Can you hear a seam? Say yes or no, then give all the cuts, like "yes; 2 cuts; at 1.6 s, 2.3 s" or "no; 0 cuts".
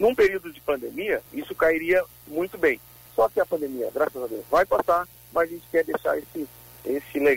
yes; 1 cut; at 1.3 s